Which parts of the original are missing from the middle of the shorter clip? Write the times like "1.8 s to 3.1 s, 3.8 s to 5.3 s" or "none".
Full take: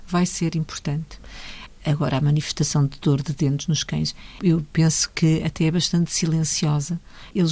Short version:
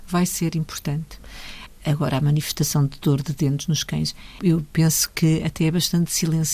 none